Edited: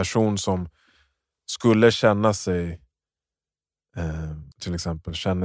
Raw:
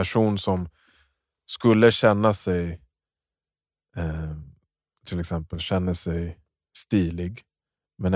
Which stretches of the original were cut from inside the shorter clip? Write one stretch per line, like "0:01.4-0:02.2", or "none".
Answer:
0:04.5-0:05.0